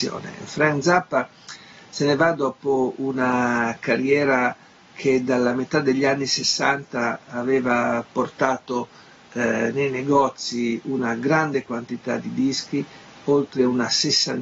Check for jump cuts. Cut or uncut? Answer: uncut